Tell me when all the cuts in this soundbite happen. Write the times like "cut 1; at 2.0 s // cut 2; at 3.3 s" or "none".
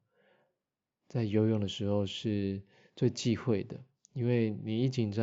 none